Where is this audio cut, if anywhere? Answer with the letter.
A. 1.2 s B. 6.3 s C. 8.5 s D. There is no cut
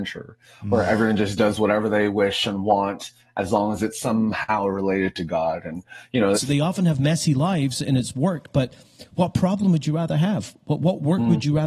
B